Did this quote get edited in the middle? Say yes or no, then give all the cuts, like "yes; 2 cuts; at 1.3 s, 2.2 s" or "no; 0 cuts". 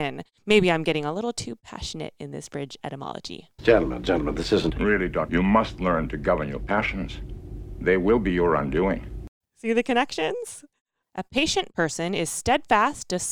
yes; 3 cuts; at 5.3 s, 9.4 s, 11.0 s